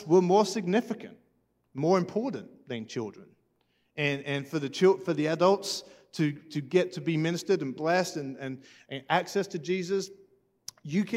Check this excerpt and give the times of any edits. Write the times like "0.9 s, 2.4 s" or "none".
none

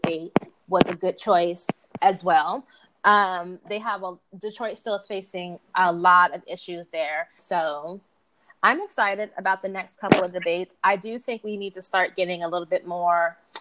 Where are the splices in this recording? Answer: 7.4 s

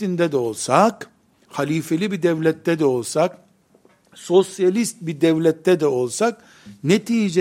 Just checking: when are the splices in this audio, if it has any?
none

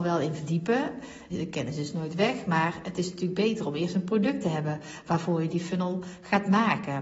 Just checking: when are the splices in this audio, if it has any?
1.3 s

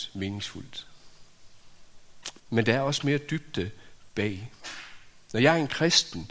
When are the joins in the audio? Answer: 2.4 s

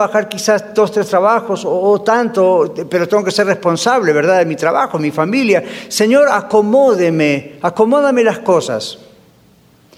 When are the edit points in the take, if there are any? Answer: none

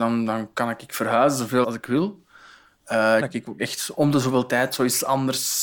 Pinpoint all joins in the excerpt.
1.6 s, 3.2 s

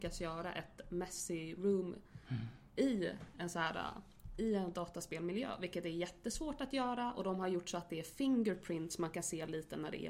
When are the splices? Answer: none

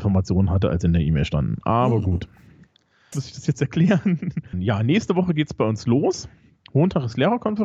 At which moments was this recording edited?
3.1 s, 4.5 s

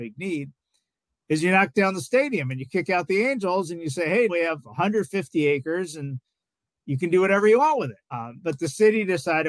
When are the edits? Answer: 4.3 s, 8.1 s

